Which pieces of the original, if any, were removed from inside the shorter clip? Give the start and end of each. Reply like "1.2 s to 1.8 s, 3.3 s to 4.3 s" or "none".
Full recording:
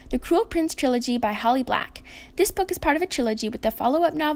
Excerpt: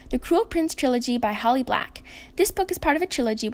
none